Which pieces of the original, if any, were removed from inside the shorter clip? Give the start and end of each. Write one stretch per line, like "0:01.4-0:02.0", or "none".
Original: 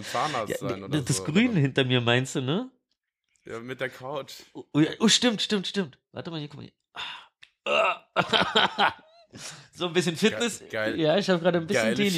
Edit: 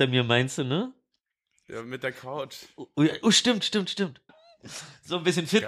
0:06.1-0:09.0